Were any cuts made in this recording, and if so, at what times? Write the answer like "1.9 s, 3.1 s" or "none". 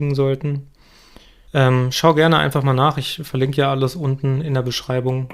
1.5 s